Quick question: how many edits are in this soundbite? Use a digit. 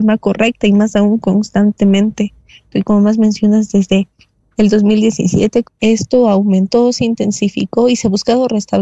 2